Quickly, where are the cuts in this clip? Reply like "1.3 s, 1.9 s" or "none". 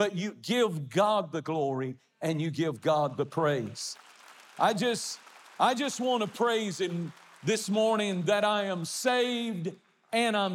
none